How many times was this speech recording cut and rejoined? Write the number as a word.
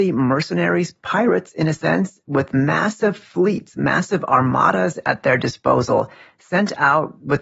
zero